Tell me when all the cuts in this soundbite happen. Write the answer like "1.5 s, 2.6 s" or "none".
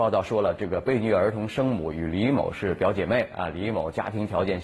none